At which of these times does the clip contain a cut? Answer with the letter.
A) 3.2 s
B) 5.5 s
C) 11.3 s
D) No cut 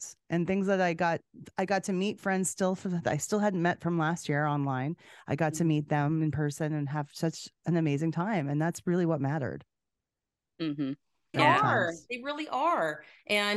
C